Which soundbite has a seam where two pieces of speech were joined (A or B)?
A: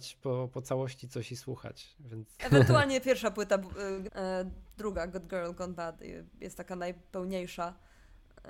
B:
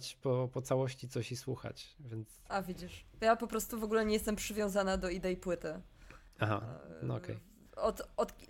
A